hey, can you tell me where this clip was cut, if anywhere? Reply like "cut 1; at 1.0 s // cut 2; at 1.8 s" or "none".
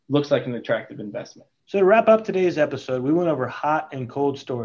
none